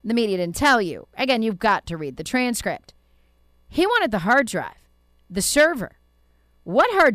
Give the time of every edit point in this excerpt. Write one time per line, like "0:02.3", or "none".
none